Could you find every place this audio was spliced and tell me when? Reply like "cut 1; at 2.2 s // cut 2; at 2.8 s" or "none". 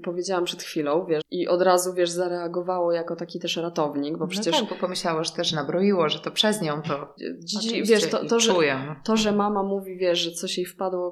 cut 1; at 1.2 s // cut 2; at 7.2 s